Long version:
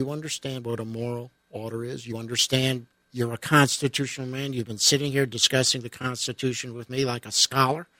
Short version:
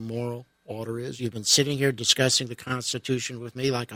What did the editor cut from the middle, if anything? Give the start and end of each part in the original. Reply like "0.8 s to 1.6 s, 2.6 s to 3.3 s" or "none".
2.0 s to 4.5 s